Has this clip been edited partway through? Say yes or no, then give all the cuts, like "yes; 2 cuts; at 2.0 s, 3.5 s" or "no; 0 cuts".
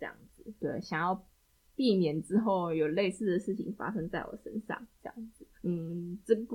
yes; 1 cut; at 5.5 s